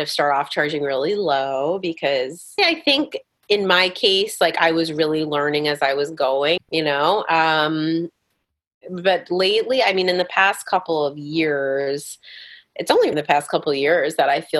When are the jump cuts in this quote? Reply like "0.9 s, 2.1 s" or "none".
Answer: 2.6 s, 6.6 s, 13.1 s

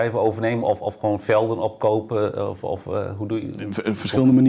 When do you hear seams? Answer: none

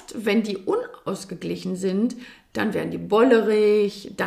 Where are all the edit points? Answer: none

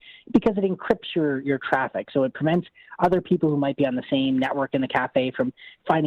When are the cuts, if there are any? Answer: none

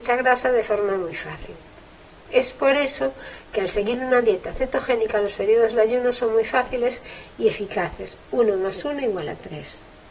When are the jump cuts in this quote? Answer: none

